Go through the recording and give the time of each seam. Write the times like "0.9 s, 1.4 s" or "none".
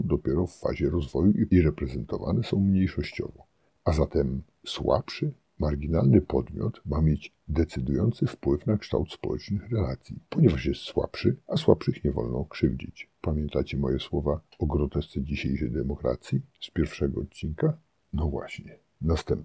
none